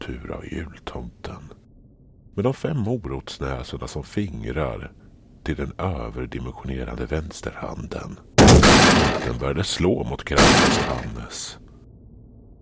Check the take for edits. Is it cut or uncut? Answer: uncut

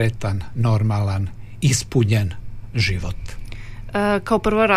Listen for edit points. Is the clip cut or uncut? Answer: uncut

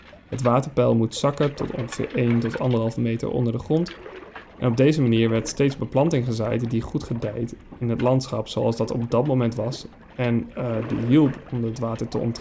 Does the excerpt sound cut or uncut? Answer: cut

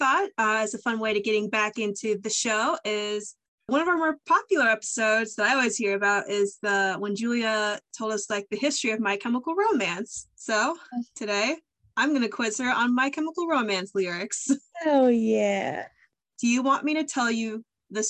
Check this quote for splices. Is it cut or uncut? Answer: cut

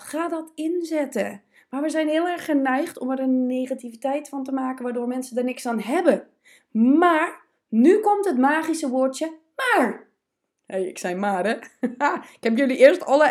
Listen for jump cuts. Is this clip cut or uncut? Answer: uncut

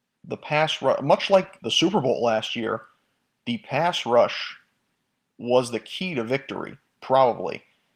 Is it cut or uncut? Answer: cut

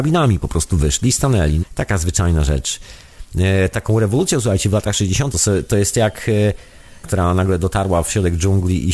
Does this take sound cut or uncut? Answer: cut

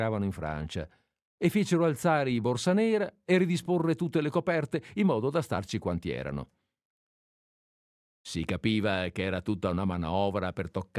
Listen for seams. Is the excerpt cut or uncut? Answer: uncut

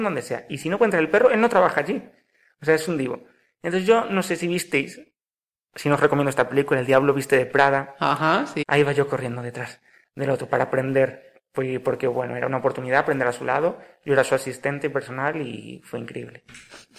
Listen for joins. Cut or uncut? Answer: cut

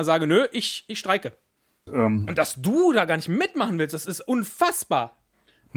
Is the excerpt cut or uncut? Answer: cut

